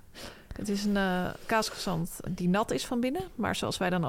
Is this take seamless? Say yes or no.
no